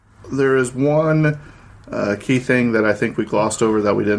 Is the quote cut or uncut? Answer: uncut